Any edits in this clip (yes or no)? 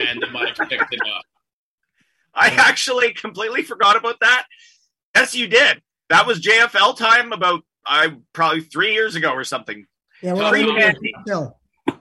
no